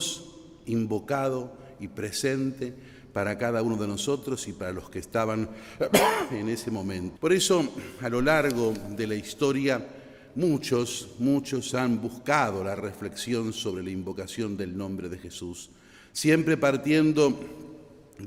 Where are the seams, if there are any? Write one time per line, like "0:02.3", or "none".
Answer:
0:07.2